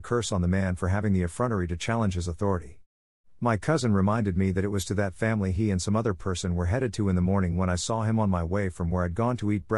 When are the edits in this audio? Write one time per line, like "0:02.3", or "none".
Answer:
none